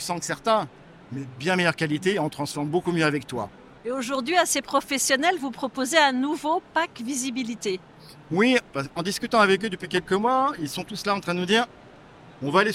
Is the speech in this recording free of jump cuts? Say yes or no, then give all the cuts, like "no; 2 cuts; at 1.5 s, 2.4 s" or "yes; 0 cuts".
no; 1 cut; at 3.8 s